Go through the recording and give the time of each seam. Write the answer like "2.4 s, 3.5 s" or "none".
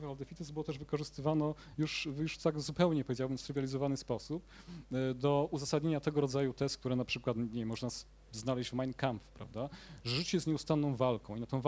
none